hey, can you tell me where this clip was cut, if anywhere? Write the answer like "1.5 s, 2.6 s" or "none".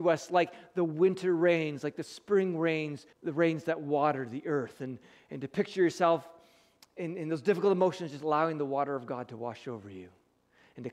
3.1 s